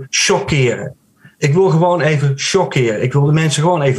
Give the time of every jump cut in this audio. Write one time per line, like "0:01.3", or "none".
none